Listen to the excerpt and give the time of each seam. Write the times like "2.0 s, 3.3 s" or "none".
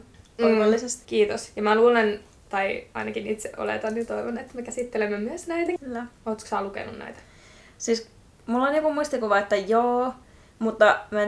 1.0 s, 5.8 s